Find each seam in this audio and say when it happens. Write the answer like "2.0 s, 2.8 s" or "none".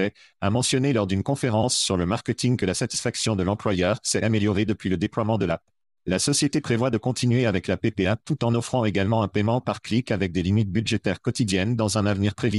none